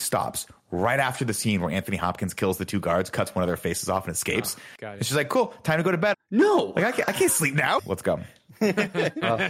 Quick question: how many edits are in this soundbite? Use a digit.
2